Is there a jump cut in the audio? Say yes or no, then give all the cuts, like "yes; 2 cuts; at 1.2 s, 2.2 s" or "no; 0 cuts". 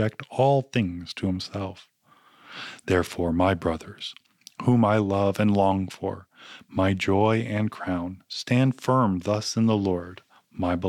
no; 0 cuts